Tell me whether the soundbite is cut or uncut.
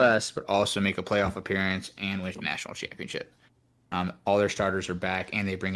cut